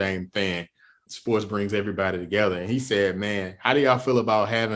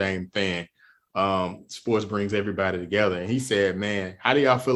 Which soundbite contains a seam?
first; 1 cut; at 1.1 s

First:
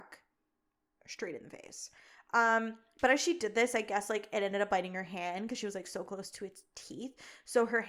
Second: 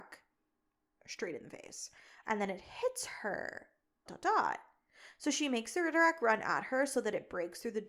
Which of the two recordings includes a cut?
second; 2 cuts; at 2.2 s, 4.1 s

